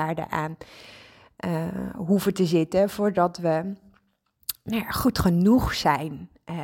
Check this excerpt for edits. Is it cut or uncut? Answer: uncut